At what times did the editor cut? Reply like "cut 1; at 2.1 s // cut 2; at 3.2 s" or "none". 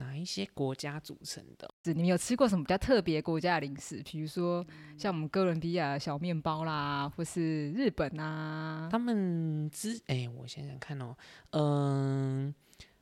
cut 1; at 1.8 s